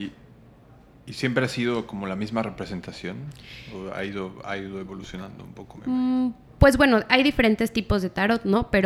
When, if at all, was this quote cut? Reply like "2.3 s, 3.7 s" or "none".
none

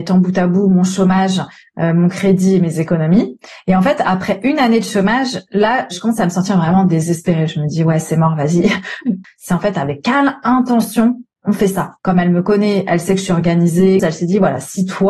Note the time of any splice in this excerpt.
9.2 s, 12.0 s, 14.0 s

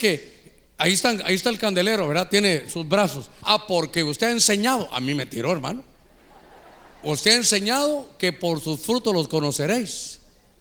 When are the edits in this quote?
3.4 s

